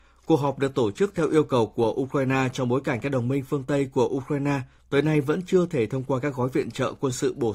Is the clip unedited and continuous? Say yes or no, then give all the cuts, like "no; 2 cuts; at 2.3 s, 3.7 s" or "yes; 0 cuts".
no; 1 cut; at 4.8 s